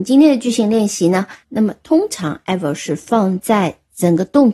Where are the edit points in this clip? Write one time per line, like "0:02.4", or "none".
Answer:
0:01.4